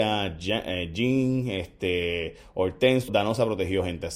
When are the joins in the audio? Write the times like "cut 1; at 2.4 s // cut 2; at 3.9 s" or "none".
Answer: cut 1; at 3.1 s